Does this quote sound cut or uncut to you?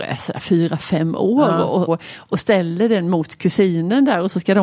cut